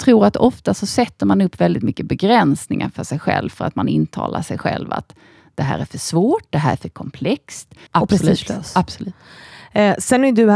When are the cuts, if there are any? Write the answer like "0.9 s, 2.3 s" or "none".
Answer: 7.9 s